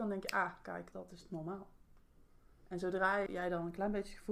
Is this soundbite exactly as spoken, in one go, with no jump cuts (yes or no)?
no